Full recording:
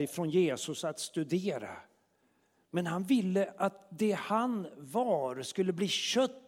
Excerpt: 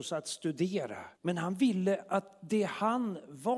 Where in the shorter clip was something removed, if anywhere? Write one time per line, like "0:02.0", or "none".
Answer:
0:01.2